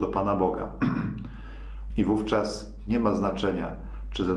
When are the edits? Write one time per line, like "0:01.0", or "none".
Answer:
0:01.9